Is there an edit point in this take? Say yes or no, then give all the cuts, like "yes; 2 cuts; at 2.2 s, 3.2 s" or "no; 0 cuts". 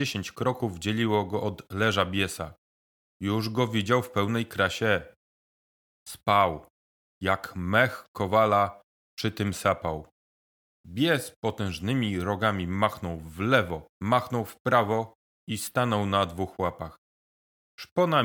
yes; 2 cuts; at 10.8 s, 13.9 s